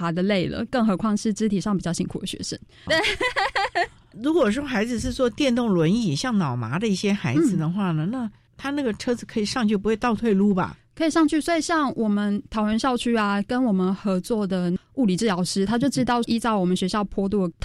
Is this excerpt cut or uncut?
cut